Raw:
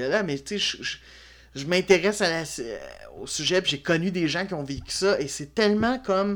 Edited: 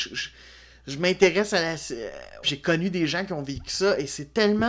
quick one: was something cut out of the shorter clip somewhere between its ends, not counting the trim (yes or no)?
yes